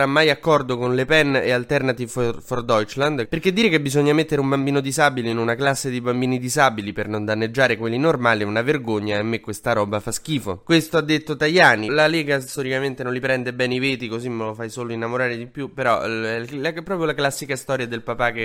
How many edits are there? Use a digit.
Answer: 2